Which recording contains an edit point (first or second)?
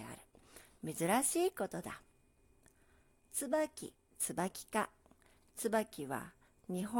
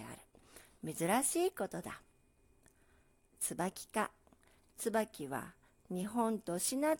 second